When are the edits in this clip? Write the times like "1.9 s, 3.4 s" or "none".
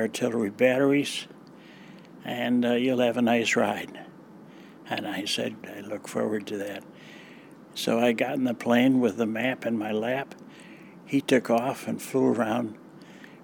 5.6 s